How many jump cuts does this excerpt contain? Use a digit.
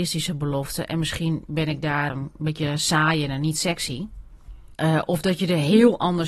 2